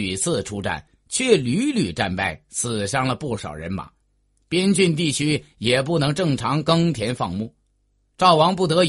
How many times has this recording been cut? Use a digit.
0